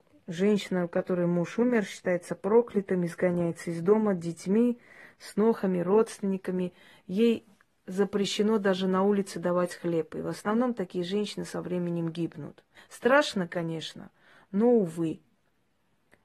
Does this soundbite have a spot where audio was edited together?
yes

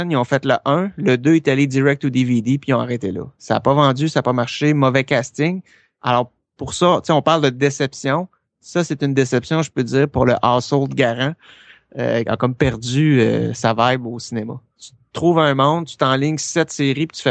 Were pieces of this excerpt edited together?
yes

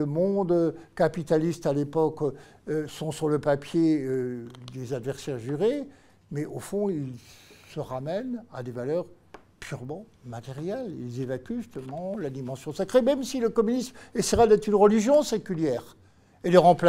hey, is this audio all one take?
yes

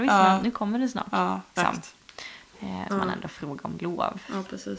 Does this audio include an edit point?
yes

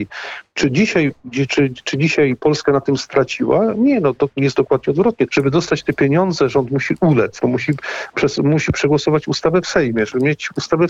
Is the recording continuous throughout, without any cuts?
no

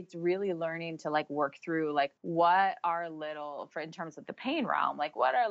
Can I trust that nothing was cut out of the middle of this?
no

